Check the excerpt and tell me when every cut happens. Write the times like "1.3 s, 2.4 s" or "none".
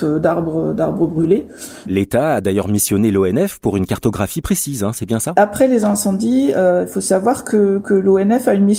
1.8 s